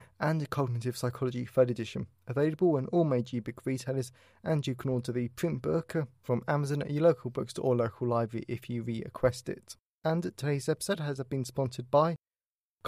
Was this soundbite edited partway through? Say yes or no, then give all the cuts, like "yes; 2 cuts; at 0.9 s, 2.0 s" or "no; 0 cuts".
yes; 1 cut; at 9.9 s